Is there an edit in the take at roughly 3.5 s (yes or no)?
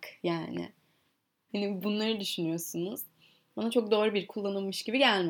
yes